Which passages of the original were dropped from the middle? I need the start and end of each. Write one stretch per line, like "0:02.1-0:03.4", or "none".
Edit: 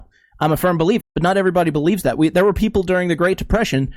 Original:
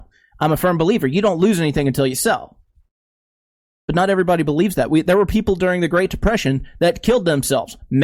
0:01.0-0:03.7